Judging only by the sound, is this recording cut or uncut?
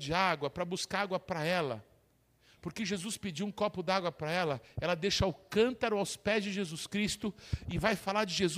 uncut